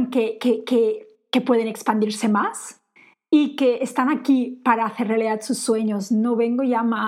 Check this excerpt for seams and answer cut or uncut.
uncut